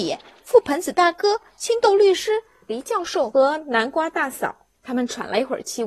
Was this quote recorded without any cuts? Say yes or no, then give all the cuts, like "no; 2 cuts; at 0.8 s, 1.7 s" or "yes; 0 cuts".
no; 1 cut; at 4.8 s